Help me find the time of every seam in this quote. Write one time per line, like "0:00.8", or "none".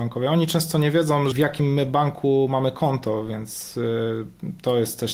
0:01.3